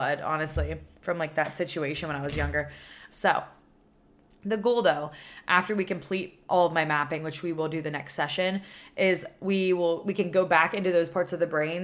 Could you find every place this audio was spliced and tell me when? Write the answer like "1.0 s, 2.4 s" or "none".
3.1 s